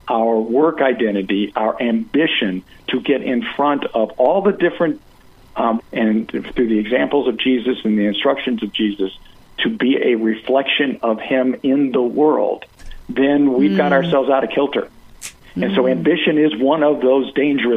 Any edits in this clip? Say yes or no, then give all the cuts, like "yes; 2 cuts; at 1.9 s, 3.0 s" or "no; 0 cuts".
yes; 1 cut; at 5.8 s